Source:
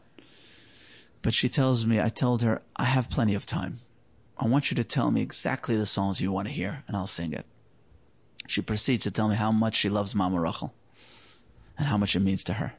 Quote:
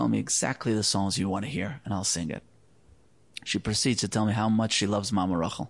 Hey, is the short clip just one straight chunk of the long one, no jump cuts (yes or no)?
yes